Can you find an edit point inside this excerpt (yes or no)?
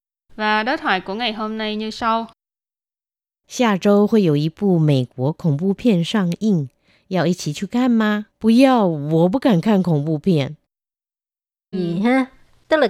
yes